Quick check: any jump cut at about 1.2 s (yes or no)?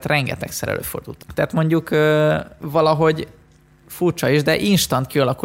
yes